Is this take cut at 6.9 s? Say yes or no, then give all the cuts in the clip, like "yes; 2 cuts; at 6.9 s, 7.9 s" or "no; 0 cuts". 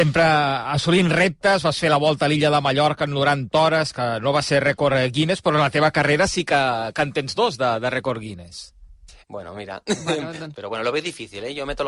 no; 2 cuts; at 9.2 s, 10.5 s